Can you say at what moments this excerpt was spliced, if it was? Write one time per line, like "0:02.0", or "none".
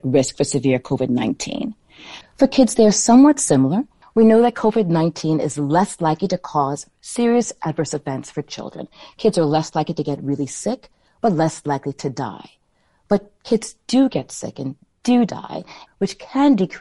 0:02.2
0:04.0
0:15.9